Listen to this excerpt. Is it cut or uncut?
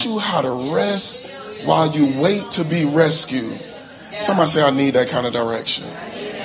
cut